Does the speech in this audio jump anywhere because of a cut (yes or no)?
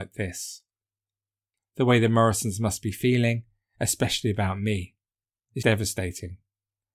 yes